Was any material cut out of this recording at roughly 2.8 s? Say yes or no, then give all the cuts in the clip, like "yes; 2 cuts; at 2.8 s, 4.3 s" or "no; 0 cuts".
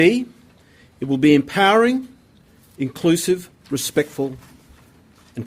yes; 1 cut; at 2.8 s